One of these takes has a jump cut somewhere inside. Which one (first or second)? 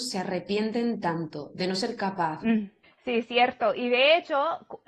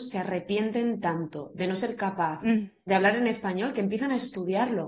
first